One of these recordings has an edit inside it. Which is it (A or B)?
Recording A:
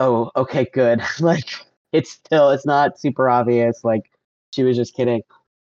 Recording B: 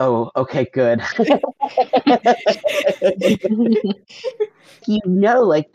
B